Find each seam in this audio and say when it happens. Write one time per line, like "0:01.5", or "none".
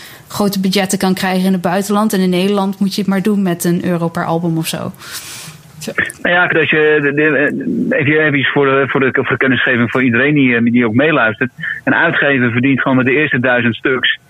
0:06.5